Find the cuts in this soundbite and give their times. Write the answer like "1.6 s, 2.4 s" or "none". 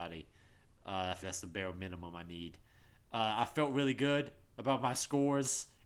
1.2 s